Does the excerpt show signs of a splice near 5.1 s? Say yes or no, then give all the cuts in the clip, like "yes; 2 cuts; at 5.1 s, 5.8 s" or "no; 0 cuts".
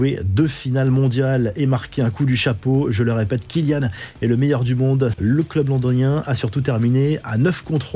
yes; 1 cut; at 5.1 s